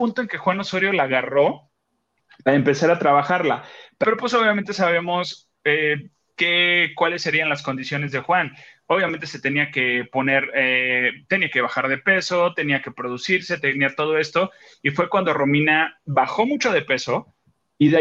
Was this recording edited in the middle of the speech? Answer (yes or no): no